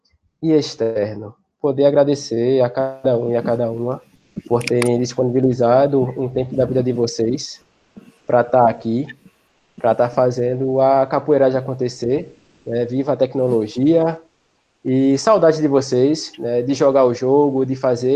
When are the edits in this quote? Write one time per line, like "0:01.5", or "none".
none